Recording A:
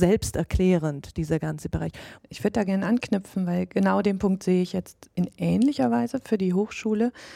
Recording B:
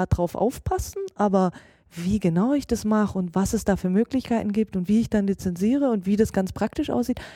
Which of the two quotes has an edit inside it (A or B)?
A